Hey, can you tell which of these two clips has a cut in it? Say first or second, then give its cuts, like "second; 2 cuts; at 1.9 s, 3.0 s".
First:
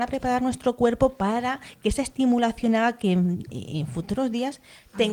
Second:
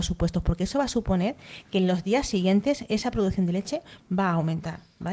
first; 1 cut; at 3.5 s